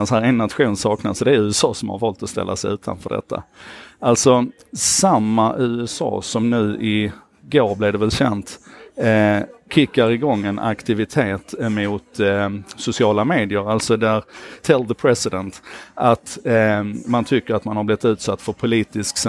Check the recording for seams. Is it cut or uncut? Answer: cut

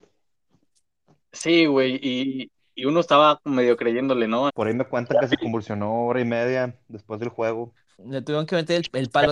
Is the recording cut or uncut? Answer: cut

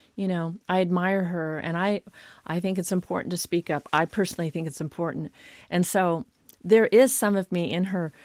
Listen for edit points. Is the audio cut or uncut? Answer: uncut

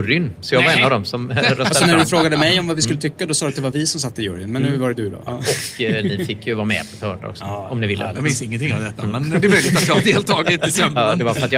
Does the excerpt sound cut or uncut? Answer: cut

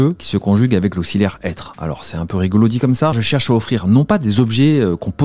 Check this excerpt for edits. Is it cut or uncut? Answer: cut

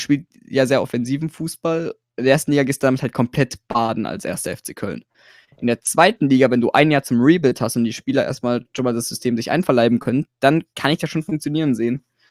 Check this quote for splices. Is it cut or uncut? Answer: uncut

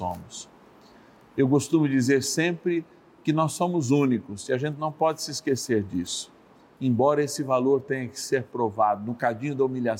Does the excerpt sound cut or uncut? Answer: cut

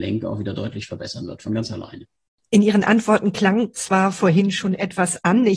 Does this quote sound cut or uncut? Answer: uncut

